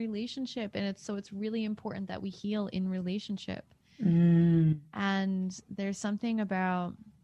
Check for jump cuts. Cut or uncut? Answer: uncut